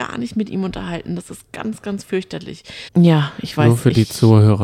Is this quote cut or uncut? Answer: cut